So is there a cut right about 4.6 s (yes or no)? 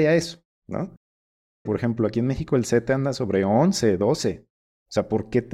no